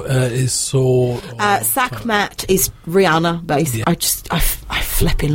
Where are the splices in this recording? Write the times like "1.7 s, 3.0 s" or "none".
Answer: 3.8 s